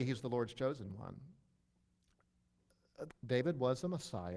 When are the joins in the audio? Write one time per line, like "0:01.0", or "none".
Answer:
0:03.1